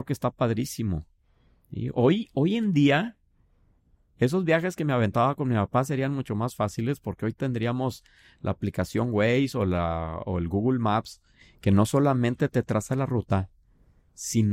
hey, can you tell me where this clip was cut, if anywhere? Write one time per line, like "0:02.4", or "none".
none